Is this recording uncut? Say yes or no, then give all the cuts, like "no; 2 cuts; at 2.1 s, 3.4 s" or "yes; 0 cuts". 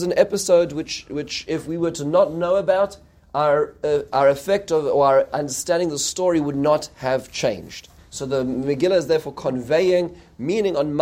no; 1 cut; at 8.0 s